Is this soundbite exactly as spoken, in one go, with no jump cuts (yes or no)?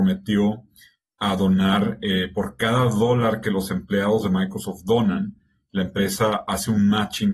yes